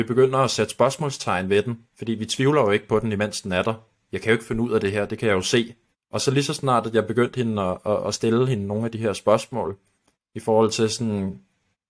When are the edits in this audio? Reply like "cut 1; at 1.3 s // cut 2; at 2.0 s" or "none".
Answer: cut 1; at 1.9 s // cut 2; at 5.9 s

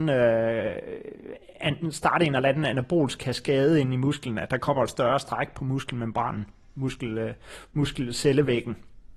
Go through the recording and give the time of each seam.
none

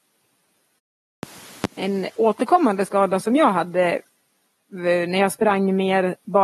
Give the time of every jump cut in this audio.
none

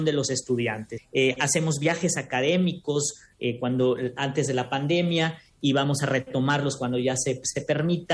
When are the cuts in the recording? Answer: cut 1; at 1.0 s

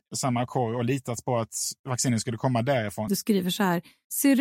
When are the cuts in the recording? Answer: cut 1; at 3.1 s

